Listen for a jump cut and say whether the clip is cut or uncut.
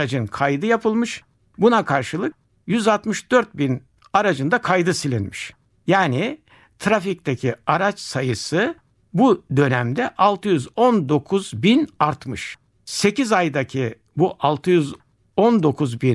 uncut